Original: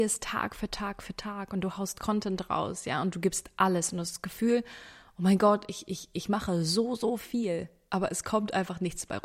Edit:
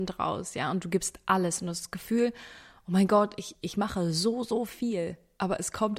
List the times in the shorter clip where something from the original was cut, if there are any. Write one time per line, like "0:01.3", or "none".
0:03.5